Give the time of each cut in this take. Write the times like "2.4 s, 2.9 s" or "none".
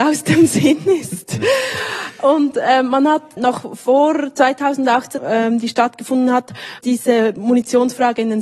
3.4 s, 5.2 s, 6.8 s